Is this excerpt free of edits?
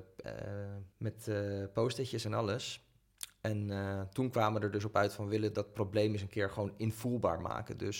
no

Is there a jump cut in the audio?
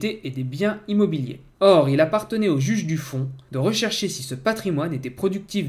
no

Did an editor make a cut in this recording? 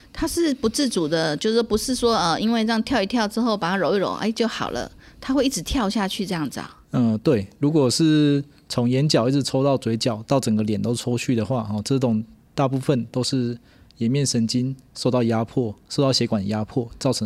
no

